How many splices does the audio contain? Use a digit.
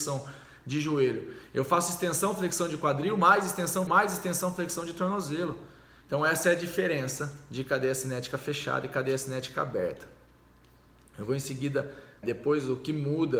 3